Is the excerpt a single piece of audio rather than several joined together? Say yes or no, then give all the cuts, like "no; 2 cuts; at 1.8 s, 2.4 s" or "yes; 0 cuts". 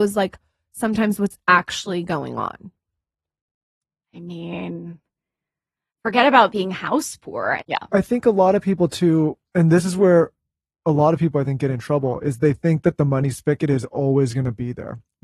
no; 1 cut; at 7.6 s